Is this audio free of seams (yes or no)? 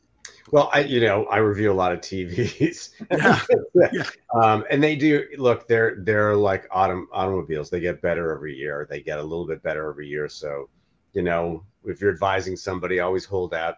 yes